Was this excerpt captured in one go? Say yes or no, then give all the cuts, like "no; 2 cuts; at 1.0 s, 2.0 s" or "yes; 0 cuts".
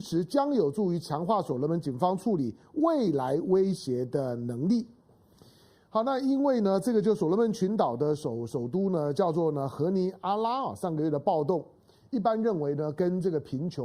yes; 0 cuts